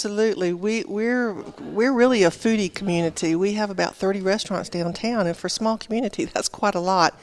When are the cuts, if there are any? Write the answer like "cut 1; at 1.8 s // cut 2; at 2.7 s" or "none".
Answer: none